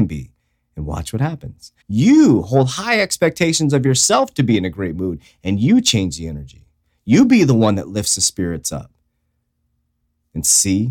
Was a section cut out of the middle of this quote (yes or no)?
yes